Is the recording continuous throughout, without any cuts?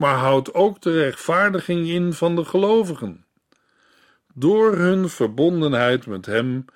yes; 0 cuts

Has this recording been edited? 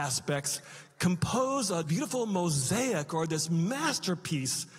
yes; 1 cut; at 1.8 s

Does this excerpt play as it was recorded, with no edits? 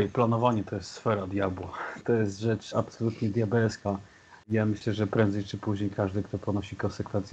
yes; 0 cuts

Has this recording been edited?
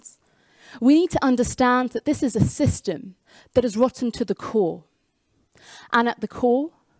no; 0 cuts

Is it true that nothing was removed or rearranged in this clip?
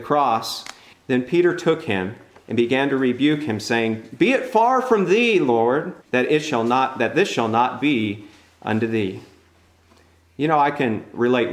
no; 2 cuts; at 0.9 s, 6.0 s

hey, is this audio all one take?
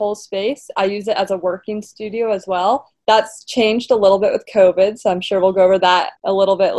no; 1 cut; at 2.9 s

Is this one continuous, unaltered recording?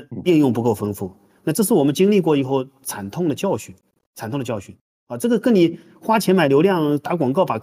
yes; 0 cuts

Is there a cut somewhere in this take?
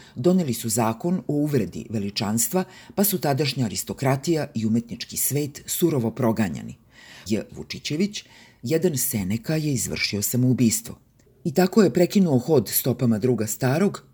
yes; 2 cuts; at 7.3 s, 11.2 s

